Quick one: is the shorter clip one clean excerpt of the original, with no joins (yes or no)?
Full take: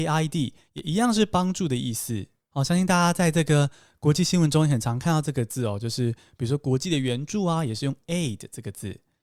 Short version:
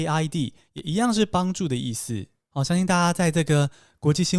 yes